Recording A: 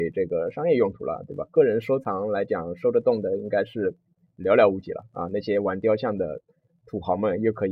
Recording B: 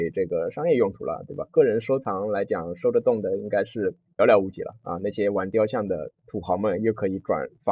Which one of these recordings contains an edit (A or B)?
B